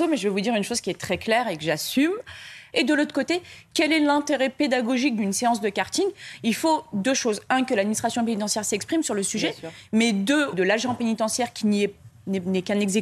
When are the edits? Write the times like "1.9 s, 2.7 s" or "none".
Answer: 2.7 s, 10.5 s